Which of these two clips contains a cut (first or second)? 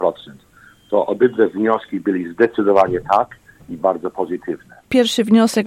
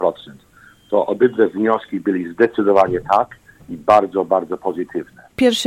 first